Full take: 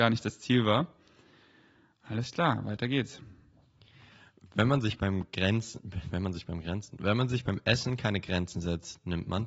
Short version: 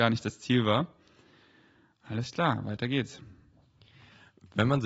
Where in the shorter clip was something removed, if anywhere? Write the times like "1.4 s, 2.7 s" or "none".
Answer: none

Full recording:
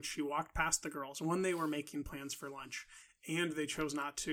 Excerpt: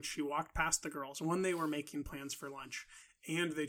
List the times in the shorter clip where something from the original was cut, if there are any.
none

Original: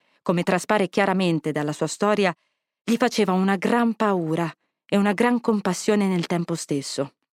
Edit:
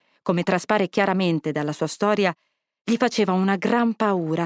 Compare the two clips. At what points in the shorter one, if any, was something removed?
none

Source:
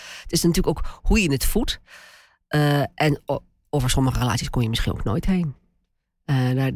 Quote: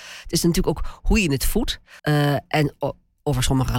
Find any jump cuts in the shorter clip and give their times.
2.0 s

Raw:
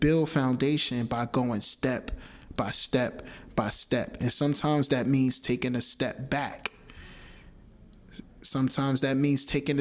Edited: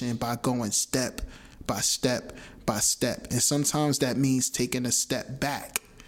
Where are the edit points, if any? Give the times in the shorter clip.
none

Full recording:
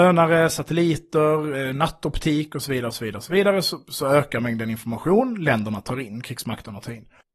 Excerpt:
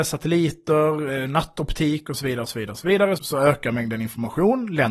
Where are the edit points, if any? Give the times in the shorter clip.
3.2 s

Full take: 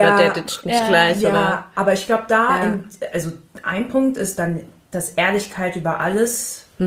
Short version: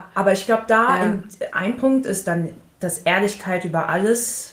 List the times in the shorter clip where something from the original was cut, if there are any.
1.5 s

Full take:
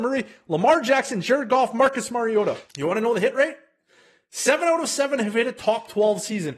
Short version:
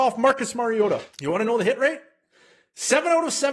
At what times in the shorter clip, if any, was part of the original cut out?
none

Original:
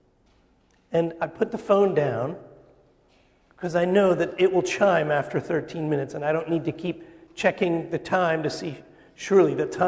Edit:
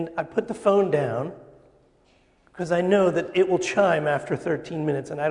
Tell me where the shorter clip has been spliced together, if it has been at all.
none

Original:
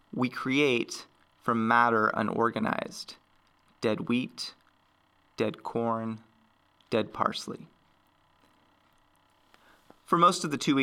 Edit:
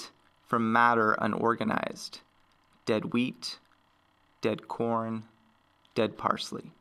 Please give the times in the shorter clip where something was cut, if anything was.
none

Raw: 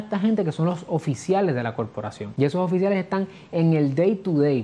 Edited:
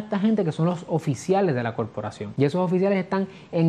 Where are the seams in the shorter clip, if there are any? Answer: none

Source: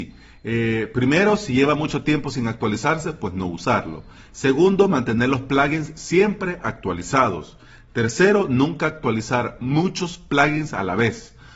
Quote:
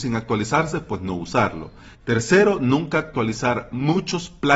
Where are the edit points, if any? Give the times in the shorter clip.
1.9 s

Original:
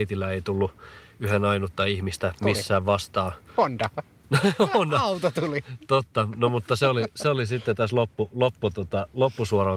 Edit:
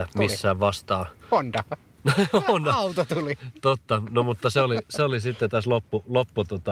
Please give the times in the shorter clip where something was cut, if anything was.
none

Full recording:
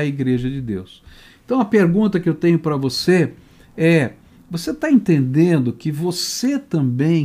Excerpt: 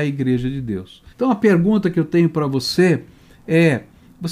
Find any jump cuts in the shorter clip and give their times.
1.1 s

